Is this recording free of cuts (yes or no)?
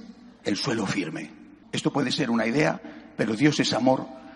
no